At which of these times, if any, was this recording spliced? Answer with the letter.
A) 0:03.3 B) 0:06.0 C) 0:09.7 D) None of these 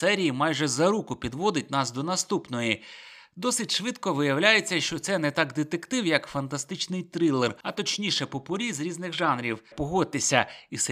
C